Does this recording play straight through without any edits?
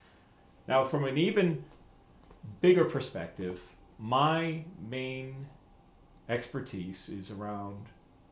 yes; 0 cuts

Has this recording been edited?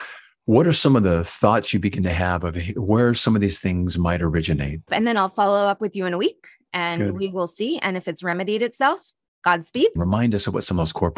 yes; 2 cuts; at 4.9 s, 10.0 s

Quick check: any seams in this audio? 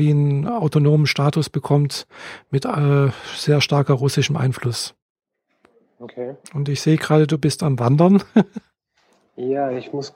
yes; 1 cut; at 6.4 s

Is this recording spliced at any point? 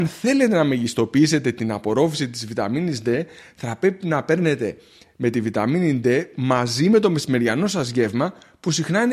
no; 0 cuts

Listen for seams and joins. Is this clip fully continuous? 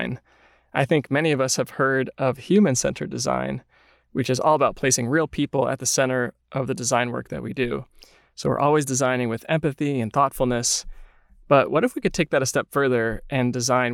yes; 0 cuts

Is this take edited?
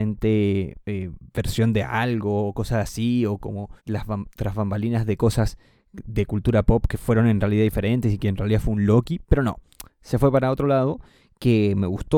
yes; 1 cut; at 3.8 s

